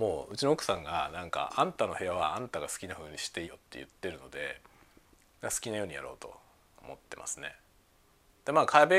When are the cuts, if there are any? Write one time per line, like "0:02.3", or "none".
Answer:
0:03.5